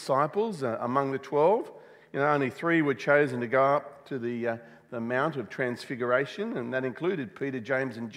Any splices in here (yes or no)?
no